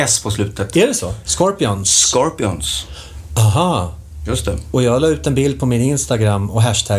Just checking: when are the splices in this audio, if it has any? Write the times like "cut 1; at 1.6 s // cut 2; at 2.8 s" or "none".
cut 1; at 1.2 s